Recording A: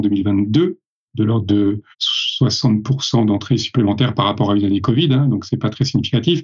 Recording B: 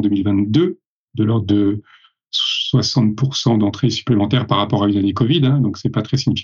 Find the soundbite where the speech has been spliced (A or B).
A